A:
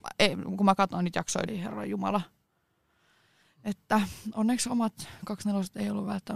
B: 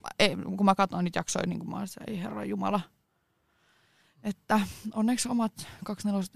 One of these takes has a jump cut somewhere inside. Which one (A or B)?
A